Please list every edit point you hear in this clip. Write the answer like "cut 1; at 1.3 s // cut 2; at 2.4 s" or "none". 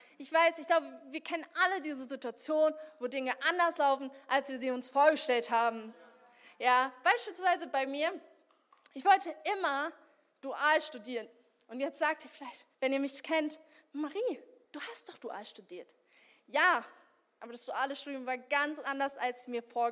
cut 1; at 12.7 s